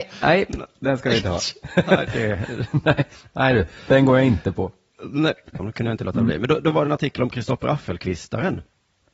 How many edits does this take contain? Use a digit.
2